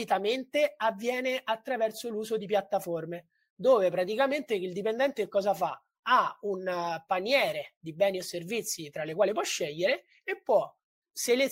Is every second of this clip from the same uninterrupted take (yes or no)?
yes